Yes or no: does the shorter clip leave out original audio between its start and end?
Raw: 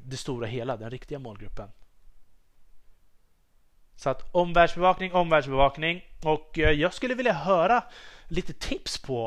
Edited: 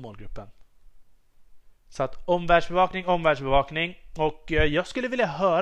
yes